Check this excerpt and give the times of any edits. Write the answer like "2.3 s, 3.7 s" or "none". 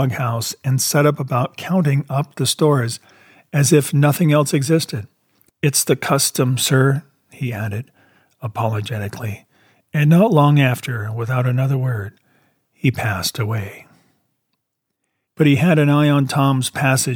5.5 s, 15.3 s